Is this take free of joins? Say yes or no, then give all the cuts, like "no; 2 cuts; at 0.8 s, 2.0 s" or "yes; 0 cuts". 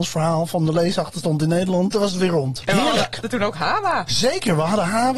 yes; 0 cuts